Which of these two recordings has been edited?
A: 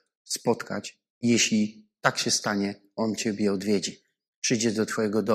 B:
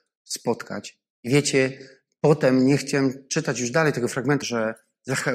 B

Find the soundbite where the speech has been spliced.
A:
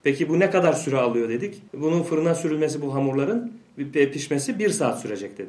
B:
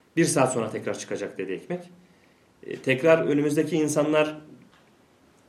A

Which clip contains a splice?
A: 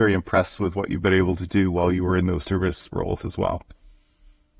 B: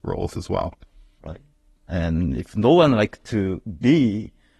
B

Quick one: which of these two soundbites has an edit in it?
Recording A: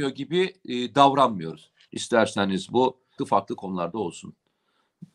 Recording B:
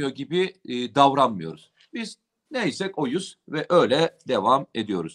A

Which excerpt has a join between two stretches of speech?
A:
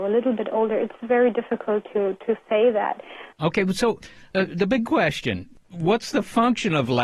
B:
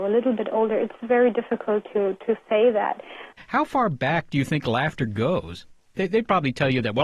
B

